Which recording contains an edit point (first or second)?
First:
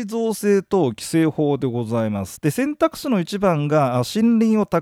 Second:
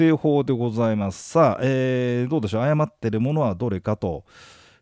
first